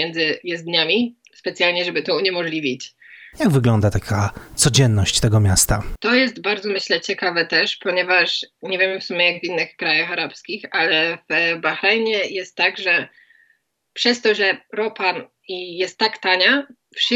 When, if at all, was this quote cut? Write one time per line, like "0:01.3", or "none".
0:03.3